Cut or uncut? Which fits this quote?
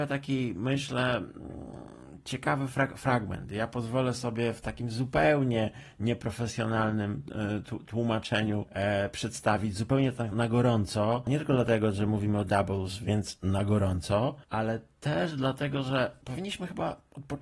cut